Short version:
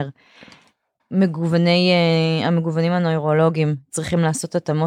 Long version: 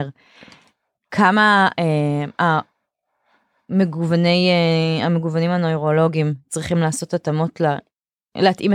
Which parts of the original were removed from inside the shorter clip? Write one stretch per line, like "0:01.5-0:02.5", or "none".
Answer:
0:01.0-0:03.6